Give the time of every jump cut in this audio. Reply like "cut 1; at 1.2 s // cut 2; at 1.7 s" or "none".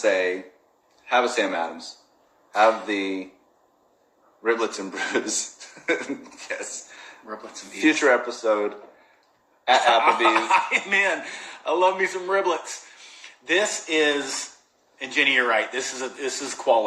none